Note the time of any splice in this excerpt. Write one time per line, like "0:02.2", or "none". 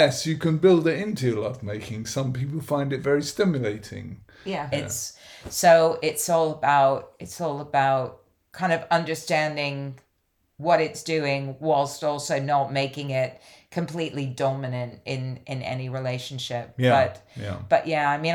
0:04.7